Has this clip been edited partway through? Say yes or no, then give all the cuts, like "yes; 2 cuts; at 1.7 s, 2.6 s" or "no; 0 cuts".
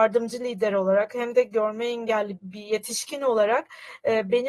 yes; 1 cut; at 2.4 s